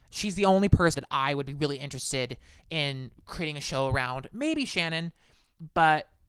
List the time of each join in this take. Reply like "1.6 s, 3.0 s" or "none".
0.9 s